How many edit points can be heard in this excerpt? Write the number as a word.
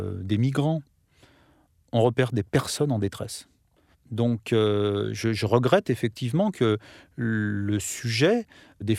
one